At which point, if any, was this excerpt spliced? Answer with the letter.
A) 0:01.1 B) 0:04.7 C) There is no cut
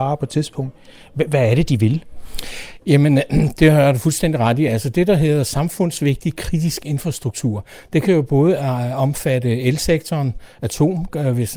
C